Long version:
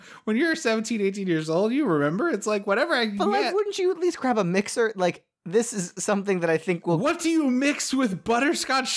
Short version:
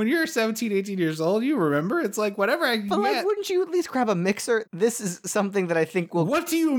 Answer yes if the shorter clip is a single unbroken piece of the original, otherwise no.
no